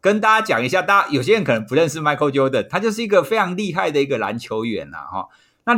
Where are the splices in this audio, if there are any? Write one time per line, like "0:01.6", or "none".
none